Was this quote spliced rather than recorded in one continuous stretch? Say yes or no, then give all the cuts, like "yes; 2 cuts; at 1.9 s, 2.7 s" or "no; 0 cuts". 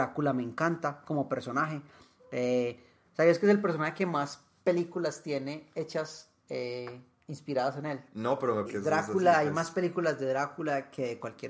yes; 1 cut; at 8.7 s